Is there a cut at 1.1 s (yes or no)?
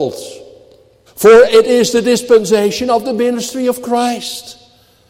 yes